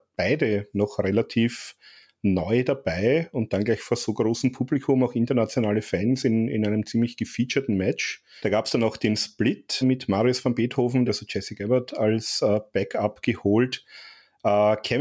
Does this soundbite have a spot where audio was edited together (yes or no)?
yes